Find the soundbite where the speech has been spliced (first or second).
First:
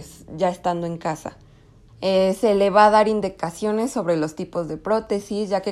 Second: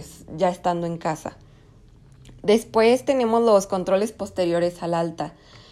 first